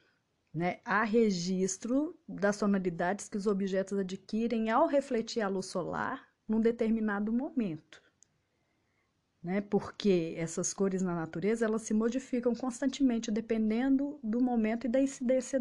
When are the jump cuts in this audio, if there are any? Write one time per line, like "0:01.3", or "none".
none